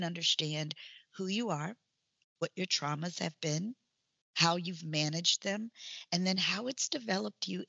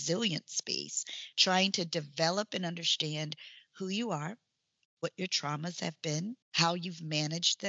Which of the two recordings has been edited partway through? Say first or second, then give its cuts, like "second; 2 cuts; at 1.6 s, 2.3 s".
second; 1 cut; at 6.4 s